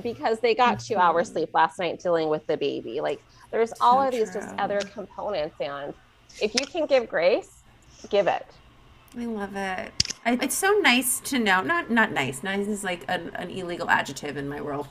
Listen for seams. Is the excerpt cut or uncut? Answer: cut